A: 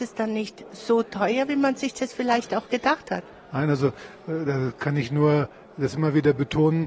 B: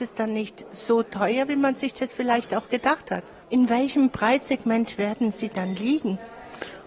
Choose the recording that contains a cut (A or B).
B